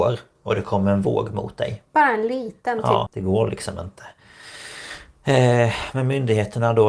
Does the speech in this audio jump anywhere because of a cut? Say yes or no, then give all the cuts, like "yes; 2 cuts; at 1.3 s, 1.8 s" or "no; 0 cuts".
yes; 1 cut; at 3.1 s